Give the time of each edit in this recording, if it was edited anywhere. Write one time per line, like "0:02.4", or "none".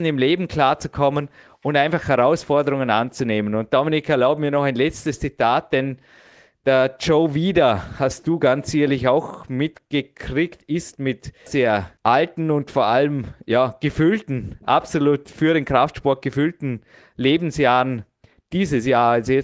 0:11.5